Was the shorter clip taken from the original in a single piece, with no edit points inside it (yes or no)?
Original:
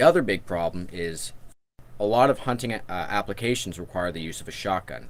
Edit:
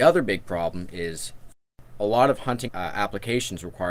no